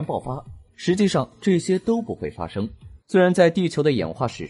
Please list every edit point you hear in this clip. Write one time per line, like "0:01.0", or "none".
0:03.0